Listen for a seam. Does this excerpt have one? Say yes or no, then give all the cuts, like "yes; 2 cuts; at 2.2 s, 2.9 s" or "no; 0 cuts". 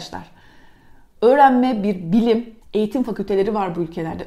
yes; 2 cuts; at 1.2 s, 2.6 s